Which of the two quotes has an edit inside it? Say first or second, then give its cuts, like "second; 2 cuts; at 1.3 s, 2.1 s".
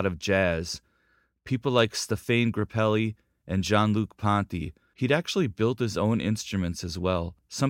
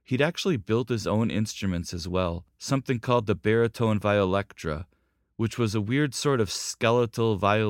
first; 1 cut; at 4.9 s